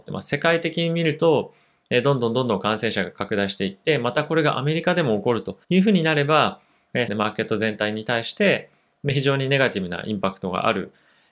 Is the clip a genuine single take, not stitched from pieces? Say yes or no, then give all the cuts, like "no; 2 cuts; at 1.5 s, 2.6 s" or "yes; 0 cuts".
no; 2 cuts; at 5.6 s, 7.1 s